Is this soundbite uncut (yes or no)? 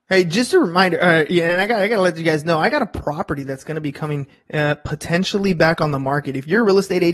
yes